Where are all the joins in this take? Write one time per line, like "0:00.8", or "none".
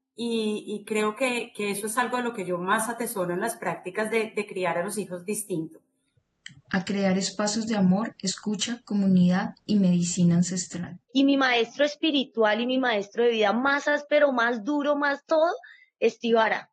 0:11.1